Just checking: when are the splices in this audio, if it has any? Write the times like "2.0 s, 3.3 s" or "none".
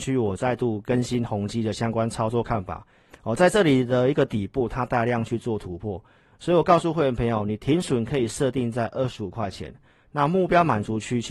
none